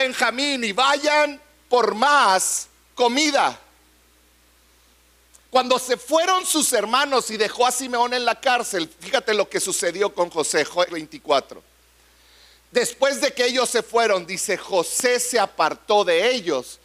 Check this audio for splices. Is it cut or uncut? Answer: cut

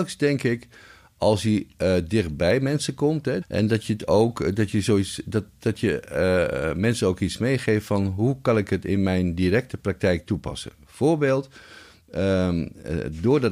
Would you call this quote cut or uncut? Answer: cut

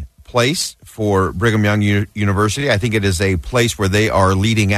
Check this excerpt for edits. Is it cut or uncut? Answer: uncut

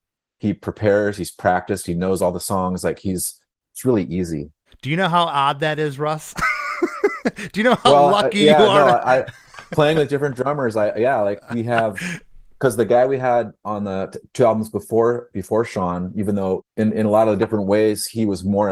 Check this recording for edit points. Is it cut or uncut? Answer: uncut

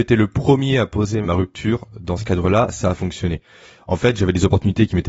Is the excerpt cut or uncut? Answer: cut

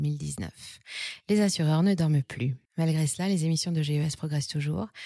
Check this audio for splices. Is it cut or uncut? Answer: cut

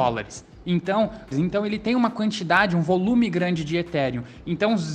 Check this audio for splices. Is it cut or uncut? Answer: cut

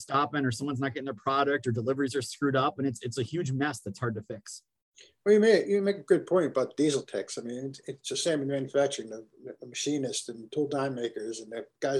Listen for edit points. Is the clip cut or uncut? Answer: uncut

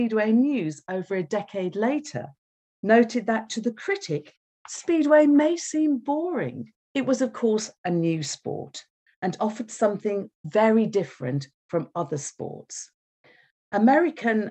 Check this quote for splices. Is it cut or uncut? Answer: cut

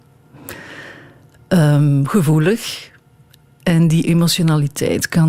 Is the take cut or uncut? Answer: uncut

